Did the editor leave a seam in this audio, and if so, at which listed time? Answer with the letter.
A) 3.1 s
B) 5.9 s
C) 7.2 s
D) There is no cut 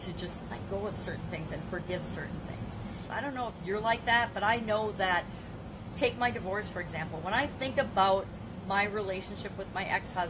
A